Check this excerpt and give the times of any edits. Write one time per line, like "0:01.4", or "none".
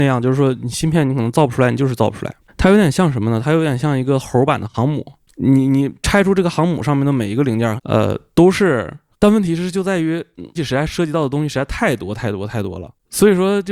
0:07.8
0:09.1
0:10.5